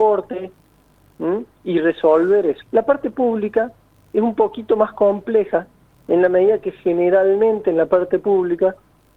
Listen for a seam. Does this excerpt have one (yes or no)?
yes